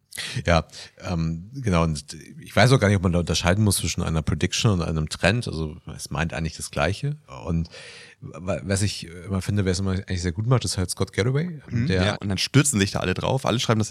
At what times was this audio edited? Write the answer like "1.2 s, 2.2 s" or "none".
12.1 s